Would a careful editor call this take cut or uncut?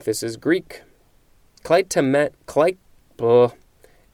cut